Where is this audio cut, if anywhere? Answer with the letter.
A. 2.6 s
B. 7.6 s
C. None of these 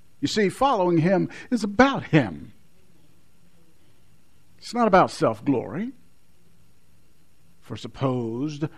B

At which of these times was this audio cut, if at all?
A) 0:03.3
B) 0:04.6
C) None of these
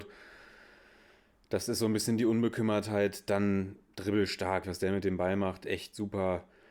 B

